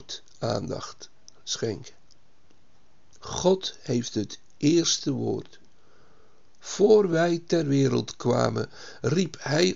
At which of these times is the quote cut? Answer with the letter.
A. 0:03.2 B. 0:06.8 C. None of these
A